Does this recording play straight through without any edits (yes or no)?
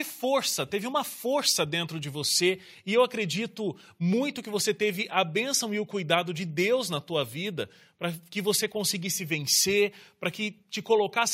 yes